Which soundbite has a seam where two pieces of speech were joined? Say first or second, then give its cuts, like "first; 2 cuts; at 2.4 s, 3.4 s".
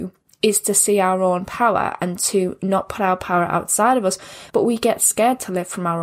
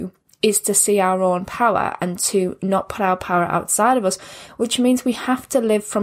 first; 1 cut; at 4.5 s